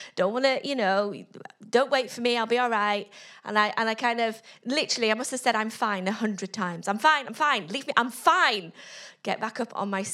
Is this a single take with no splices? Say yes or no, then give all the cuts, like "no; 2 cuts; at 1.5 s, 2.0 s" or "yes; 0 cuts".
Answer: yes; 0 cuts